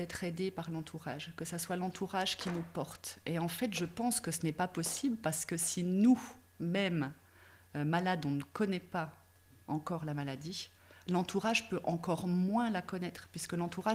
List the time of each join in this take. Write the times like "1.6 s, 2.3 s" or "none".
none